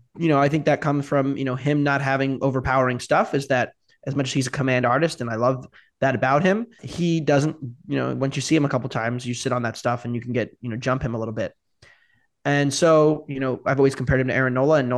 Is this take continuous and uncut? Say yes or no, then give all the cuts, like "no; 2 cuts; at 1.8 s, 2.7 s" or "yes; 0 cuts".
no; 1 cut; at 6.8 s